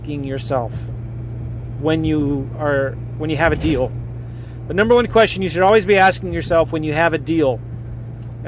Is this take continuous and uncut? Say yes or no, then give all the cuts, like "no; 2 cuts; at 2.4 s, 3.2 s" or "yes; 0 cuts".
yes; 0 cuts